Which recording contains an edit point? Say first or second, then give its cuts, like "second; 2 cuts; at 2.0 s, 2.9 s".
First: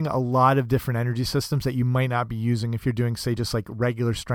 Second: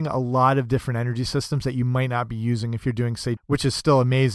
second; 1 cut; at 3.4 s